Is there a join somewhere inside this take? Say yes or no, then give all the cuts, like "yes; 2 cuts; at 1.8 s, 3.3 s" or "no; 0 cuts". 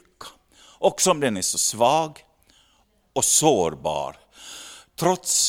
no; 0 cuts